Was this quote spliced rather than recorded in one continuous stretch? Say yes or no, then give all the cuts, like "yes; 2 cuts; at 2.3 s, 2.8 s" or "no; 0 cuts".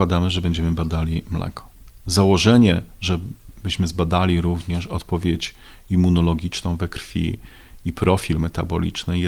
no; 0 cuts